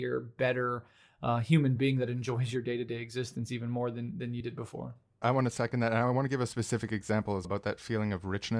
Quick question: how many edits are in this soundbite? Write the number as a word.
two